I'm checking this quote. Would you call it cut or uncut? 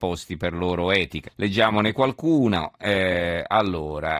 cut